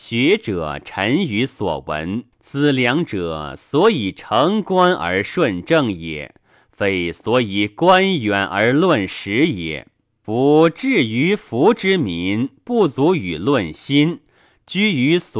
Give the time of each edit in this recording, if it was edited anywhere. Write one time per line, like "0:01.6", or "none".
0:02.3
0:10.2